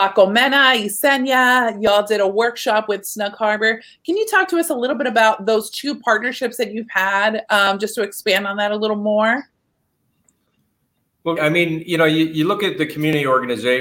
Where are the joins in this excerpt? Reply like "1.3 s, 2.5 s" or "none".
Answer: 11.4 s

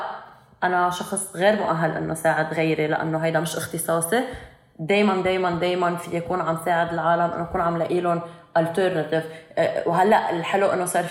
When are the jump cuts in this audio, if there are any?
none

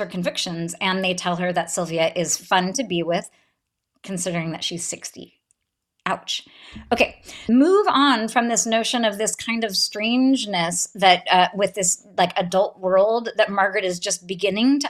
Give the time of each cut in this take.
7.5 s

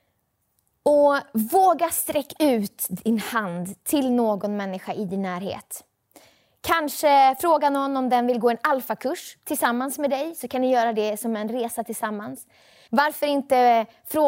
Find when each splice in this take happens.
12.9 s

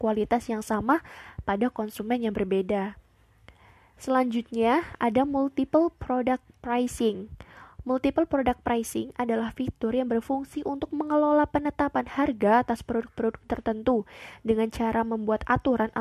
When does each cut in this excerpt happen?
none

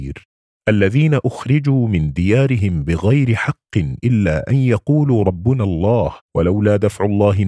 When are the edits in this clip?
6.2 s

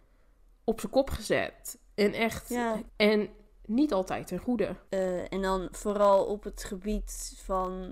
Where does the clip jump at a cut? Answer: 2.9 s, 4.9 s

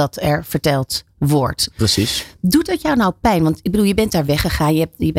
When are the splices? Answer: none

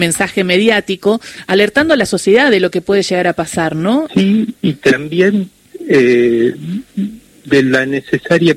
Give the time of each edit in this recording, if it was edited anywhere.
4.1 s

